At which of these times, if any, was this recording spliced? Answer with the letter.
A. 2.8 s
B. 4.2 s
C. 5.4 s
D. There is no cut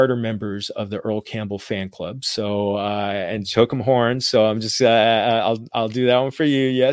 D